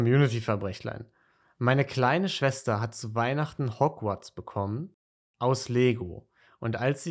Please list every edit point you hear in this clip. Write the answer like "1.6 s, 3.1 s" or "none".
none